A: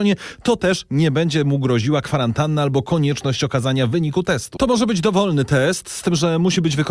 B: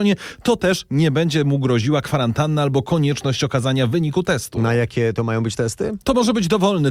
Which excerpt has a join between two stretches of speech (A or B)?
A